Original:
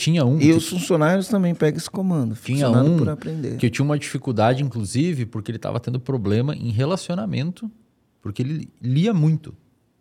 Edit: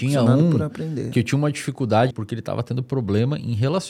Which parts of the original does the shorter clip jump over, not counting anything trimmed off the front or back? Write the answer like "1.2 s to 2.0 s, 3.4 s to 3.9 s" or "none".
4.6 s to 5.3 s